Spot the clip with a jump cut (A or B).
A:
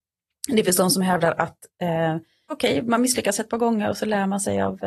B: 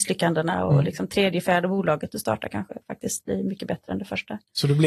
A